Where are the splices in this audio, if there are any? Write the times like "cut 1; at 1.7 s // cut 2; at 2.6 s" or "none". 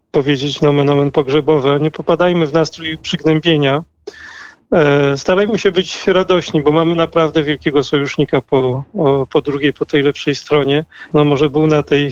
cut 1; at 11.1 s